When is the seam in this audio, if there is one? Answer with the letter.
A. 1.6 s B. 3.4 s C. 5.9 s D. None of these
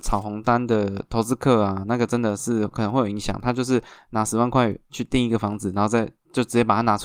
D